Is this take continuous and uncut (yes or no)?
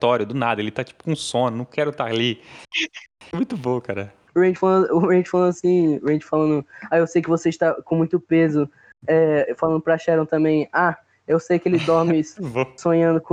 no